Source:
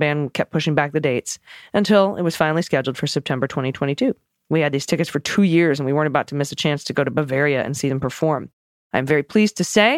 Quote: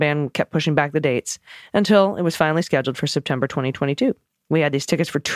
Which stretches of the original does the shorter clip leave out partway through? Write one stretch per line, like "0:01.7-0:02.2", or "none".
none